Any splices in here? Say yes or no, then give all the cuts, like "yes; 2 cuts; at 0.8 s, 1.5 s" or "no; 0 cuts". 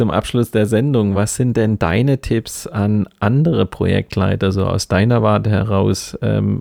no; 0 cuts